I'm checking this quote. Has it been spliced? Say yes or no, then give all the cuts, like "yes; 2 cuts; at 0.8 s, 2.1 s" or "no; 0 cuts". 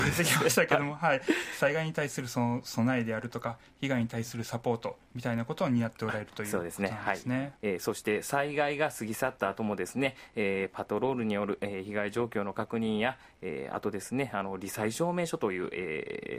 yes; 1 cut; at 7.5 s